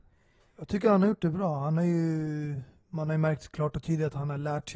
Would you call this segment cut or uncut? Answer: uncut